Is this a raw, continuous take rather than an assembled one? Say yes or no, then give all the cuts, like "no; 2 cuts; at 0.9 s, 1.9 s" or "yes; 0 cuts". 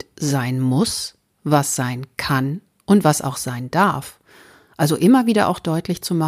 yes; 0 cuts